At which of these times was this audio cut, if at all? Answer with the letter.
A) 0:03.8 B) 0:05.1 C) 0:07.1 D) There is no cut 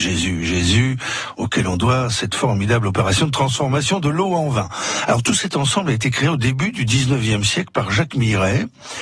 B